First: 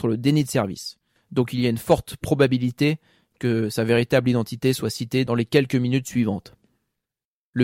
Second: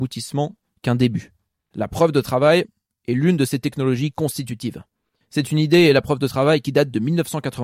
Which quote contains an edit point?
first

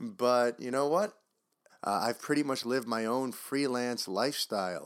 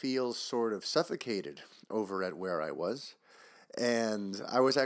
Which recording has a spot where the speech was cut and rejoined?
first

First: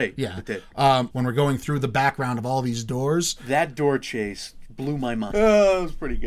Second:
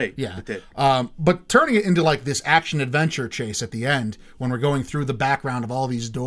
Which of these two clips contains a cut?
first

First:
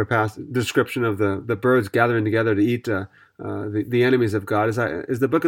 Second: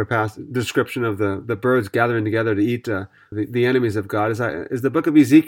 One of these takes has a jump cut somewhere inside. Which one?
second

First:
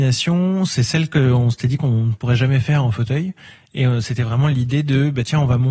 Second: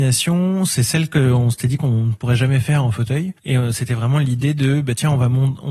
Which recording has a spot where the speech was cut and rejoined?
second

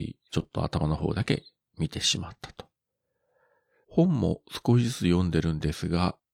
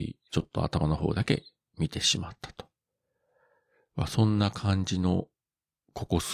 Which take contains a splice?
first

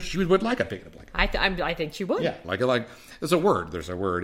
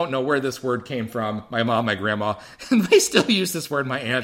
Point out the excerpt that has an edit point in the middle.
first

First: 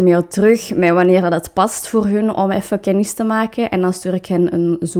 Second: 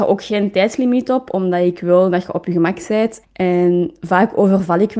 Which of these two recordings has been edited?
second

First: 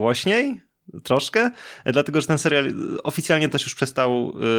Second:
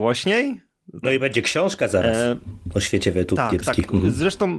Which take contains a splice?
second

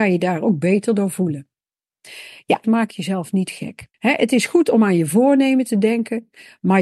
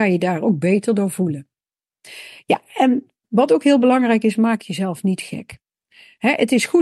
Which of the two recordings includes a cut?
first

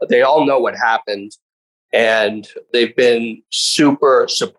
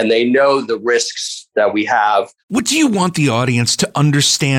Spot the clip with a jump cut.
second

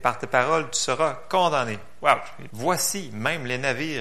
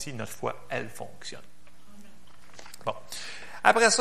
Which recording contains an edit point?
first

